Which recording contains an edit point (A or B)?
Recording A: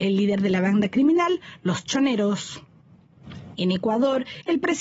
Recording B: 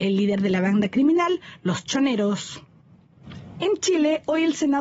A